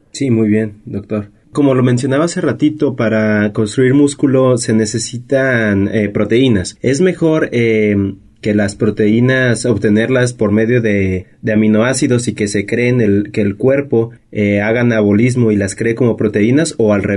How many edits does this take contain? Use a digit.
0